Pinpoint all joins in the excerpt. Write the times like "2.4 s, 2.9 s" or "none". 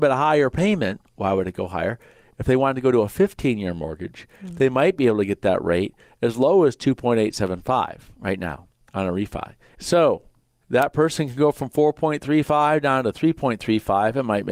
9.7 s